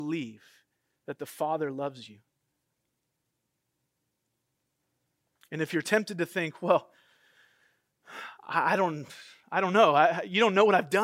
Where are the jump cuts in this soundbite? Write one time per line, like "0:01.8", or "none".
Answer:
none